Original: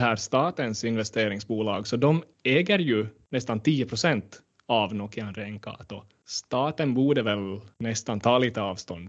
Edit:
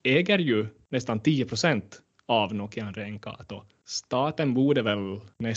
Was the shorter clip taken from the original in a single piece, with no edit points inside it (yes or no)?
yes